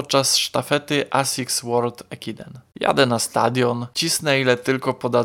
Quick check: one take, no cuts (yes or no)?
no